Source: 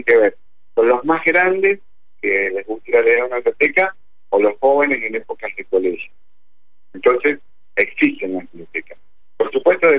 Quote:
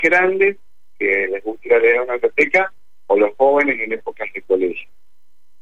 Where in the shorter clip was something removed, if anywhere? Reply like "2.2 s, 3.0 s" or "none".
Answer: none